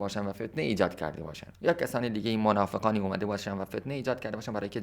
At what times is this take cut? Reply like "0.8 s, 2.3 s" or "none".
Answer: 1.5 s